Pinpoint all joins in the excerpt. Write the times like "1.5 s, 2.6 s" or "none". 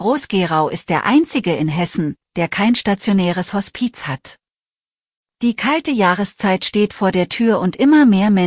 5.2 s